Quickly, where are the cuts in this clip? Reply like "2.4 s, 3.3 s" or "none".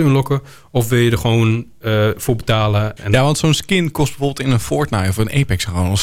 3.0 s